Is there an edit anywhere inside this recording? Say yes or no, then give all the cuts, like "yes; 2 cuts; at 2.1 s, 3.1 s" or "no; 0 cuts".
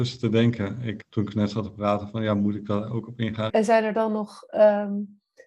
yes; 2 cuts; at 1.0 s, 3.5 s